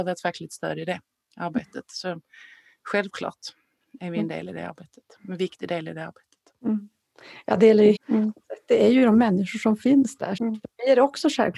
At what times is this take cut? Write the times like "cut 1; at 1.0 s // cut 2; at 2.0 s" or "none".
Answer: cut 1; at 8.0 s // cut 2; at 10.4 s